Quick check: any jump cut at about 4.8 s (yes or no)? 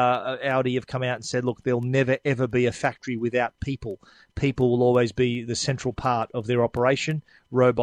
no